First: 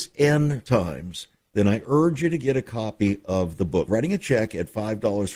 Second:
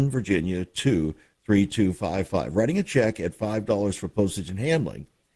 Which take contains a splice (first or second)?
first